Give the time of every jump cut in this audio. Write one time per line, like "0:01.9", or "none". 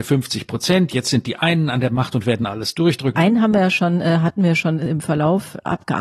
0:03.1